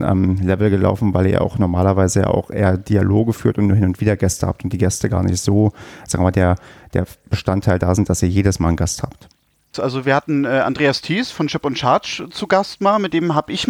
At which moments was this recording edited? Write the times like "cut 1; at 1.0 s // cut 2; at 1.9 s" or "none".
cut 1; at 9.7 s